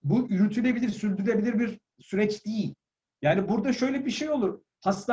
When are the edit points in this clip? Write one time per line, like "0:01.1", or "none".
0:03.0

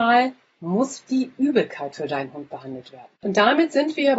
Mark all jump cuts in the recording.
0:03.1

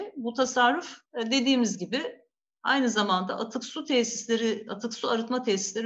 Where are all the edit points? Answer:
0:01.1

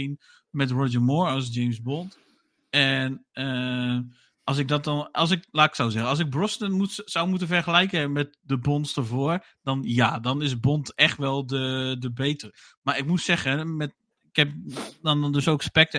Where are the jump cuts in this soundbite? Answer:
none

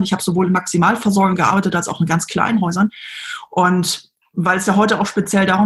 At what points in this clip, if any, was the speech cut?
0:03.5

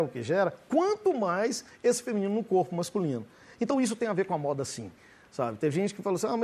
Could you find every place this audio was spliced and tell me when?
none

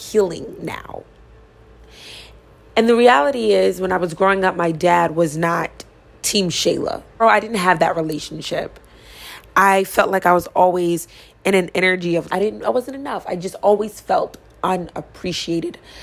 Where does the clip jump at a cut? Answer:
0:07.2
0:12.3

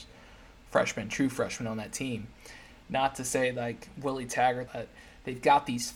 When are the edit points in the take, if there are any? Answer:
0:02.8
0:04.7

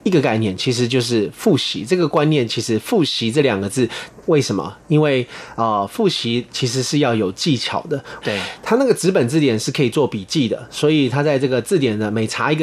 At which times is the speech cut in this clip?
0:04.2
0:08.2

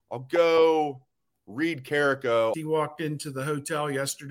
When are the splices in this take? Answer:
0:02.5

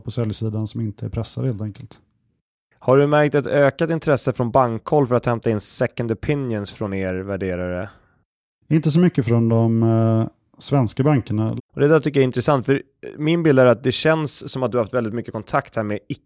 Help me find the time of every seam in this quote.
0:11.6

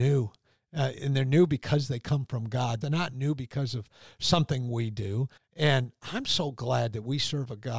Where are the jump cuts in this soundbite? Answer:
0:02.8
0:05.4

